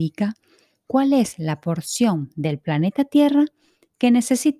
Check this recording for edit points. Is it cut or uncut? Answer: uncut